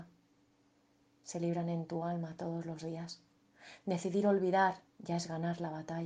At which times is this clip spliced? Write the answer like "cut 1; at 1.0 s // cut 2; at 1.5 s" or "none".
cut 1; at 4.9 s